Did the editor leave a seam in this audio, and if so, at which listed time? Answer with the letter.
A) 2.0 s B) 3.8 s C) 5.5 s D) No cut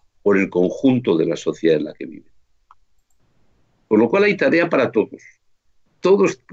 B